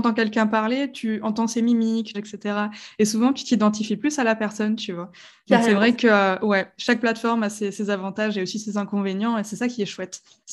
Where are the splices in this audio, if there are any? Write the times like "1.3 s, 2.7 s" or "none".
2.1 s